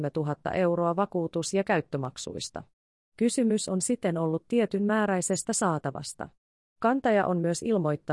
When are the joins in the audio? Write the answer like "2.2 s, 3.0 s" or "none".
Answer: none